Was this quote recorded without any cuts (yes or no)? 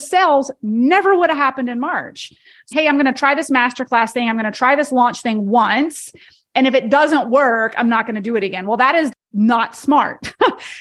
no